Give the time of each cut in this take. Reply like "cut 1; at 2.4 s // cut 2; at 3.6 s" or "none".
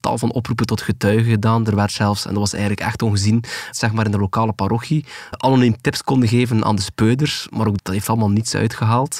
cut 1; at 3.7 s // cut 2; at 5.3 s // cut 3; at 7.8 s